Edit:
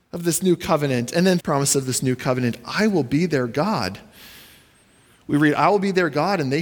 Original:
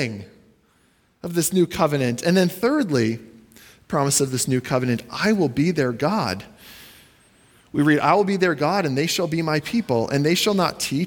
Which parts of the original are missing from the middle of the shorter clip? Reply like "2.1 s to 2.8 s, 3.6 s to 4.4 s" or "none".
2.5 s to 3.8 s